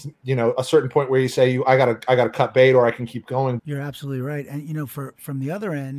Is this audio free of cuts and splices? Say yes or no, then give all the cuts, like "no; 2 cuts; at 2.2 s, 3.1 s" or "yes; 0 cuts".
no; 1 cut; at 3.6 s